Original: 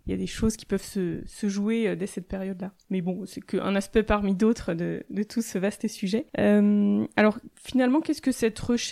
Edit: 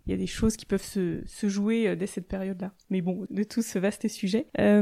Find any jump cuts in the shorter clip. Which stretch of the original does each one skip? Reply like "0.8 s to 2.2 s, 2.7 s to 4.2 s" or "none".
3.3 s to 5.1 s